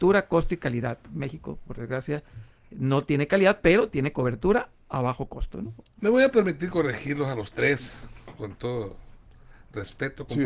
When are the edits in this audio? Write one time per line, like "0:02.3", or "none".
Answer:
0:06.0